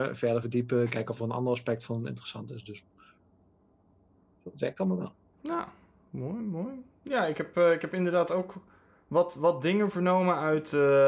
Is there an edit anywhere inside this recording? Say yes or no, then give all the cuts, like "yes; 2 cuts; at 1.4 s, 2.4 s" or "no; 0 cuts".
no; 0 cuts